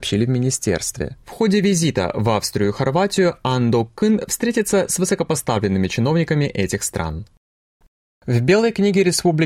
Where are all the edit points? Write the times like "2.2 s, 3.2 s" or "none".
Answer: none

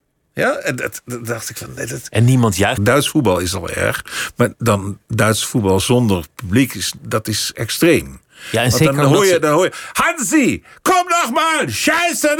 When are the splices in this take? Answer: 2.8 s

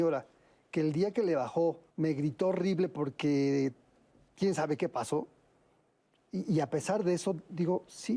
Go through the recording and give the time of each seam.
1.9 s

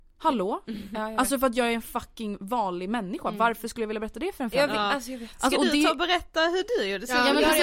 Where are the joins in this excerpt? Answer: none

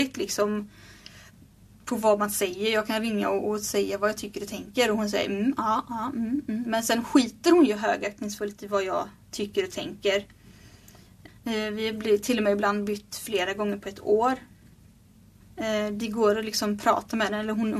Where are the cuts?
11.3 s, 15.4 s

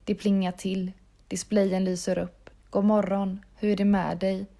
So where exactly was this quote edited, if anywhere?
2.6 s

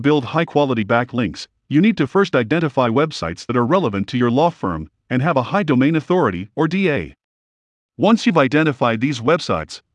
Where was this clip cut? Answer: none

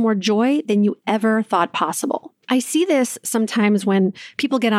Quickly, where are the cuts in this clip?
2.4 s

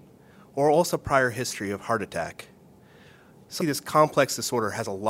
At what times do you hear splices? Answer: 3.6 s

